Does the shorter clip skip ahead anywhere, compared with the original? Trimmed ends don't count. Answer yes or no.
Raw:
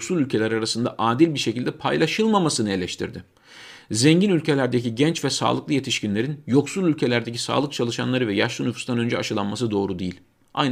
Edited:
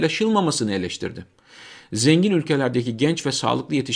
no